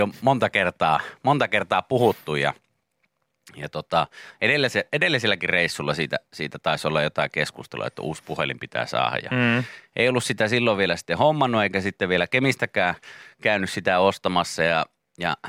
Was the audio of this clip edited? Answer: no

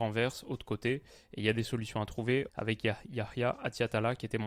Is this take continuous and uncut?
no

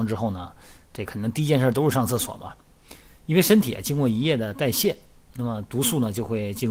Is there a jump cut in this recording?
no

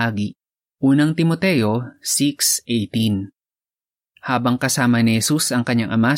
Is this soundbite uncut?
yes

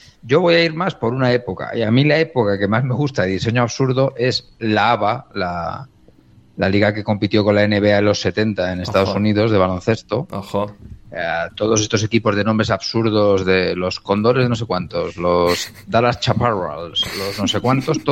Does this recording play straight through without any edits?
yes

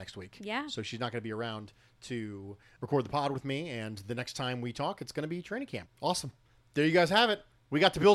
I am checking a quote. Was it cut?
yes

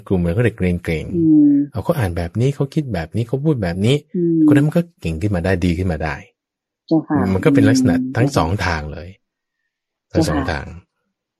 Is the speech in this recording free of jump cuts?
yes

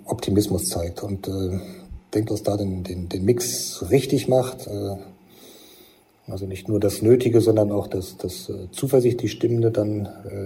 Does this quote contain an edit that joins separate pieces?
yes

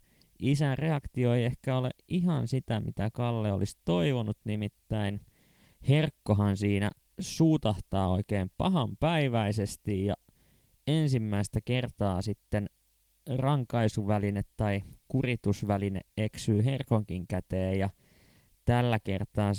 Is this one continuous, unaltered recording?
yes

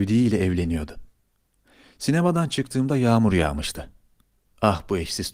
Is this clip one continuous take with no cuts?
yes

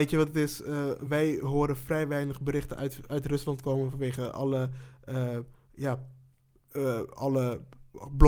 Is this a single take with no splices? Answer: yes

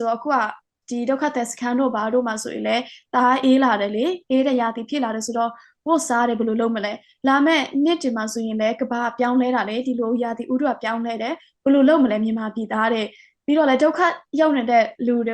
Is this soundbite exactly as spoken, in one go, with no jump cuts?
yes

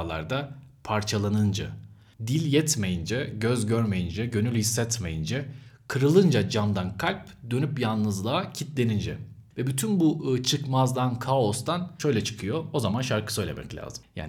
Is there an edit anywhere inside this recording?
no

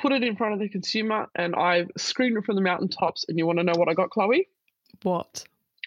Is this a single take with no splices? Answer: yes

